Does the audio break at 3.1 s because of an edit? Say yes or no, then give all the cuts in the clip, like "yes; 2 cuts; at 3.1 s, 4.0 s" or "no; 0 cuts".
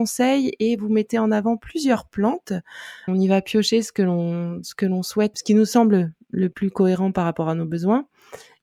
yes; 2 cuts; at 3.1 s, 5.3 s